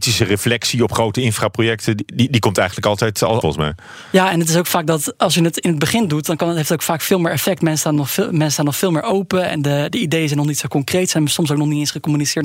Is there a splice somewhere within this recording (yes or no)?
yes